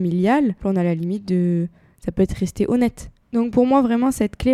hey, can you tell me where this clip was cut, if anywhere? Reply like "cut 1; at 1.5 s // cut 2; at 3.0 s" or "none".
cut 1; at 3.2 s